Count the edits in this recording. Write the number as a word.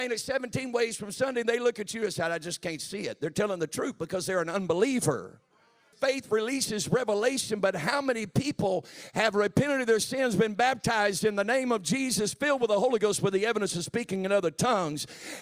one